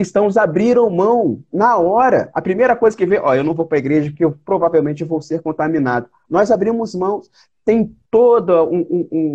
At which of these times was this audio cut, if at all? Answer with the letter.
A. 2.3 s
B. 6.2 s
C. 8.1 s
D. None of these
C